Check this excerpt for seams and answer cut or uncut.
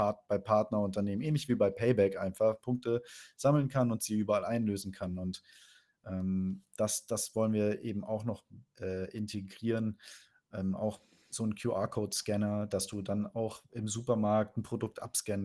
uncut